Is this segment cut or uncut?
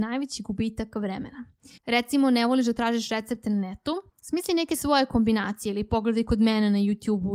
cut